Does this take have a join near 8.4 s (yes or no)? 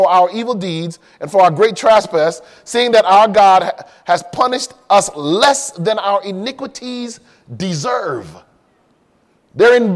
no